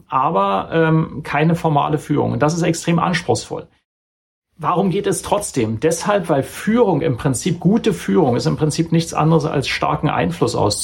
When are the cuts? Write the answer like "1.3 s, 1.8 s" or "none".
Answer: none